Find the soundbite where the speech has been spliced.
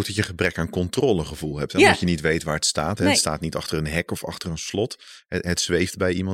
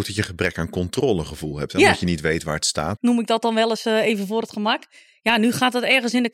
second; 1 cut; at 3.0 s

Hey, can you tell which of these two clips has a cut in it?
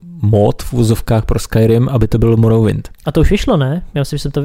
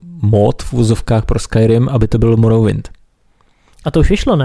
first; 1 cut; at 3.0 s

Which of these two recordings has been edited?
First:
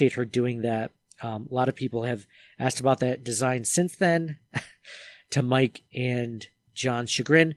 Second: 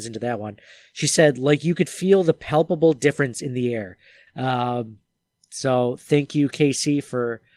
second; 1 cut; at 4.3 s

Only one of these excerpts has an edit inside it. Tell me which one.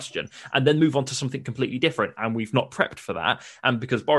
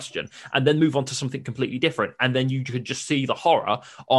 first; 1 cut; at 2.2 s

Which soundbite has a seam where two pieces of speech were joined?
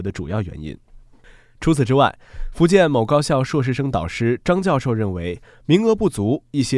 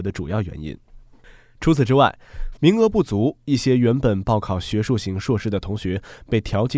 second; 1 cut; at 2.5 s

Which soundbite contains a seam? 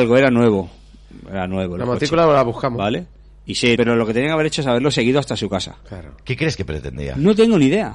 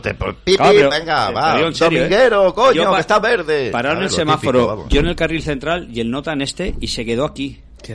first; 1 cut; at 3.8 s

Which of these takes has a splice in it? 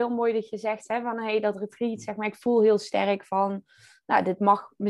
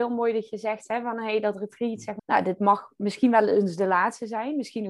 second; 1 cut; at 2.2 s

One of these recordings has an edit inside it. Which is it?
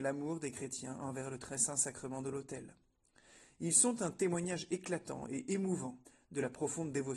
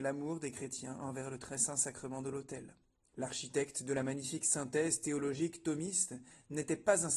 second; 1 cut; at 3.1 s

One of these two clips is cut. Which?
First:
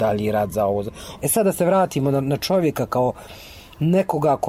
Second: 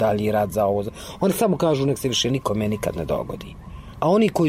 first; 1 cut; at 1.2 s

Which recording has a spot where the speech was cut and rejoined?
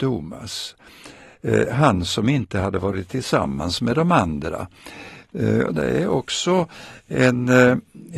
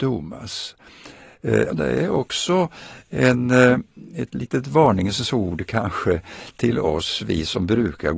second; 1 cut; at 1.7 s

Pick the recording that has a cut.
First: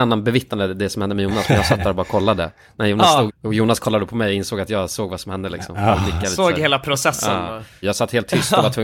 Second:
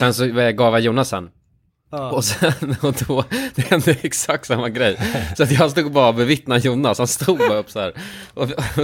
first; 2 cuts; at 3.3 s, 7.8 s

